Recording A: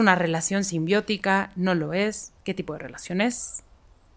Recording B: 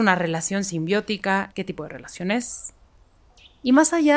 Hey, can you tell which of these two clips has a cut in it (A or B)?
B